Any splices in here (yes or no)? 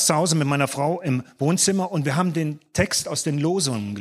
no